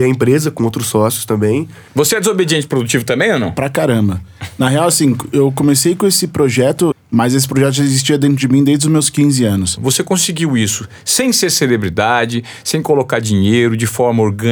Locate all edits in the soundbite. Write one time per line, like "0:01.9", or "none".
0:01.9
0:06.9
0:09.8